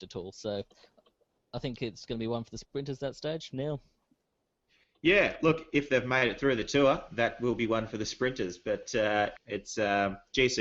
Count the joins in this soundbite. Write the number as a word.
one